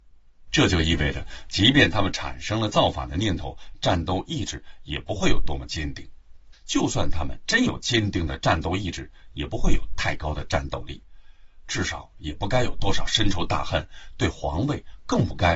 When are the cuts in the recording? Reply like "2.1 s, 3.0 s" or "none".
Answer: 6.5 s, 11.6 s